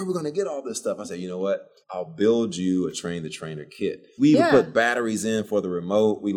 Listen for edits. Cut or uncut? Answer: cut